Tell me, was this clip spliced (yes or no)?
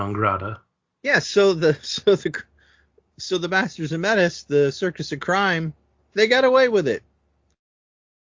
no